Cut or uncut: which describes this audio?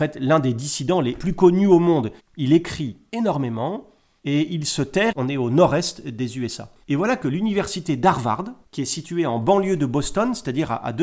cut